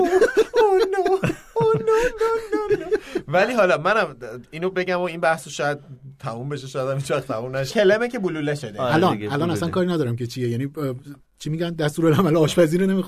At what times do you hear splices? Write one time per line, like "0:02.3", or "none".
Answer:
0:07.7